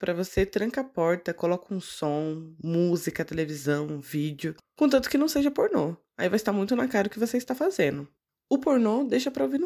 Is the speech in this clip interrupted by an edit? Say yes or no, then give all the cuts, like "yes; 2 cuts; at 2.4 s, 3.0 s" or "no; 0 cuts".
no; 0 cuts